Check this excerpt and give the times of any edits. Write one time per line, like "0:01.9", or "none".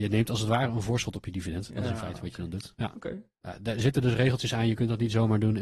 none